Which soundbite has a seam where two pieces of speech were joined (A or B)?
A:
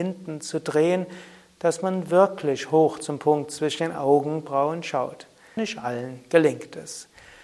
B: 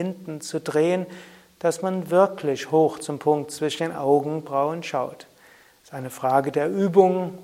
A